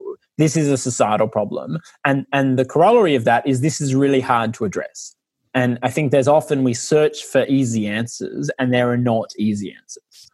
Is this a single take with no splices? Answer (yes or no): yes